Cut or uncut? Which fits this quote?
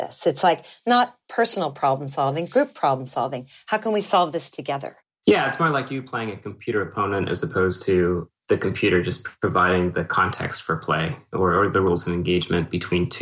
cut